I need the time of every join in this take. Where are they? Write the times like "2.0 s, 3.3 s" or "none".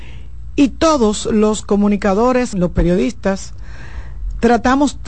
2.5 s